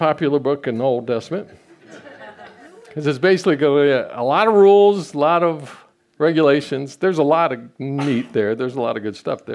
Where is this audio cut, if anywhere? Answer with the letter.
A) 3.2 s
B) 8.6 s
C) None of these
C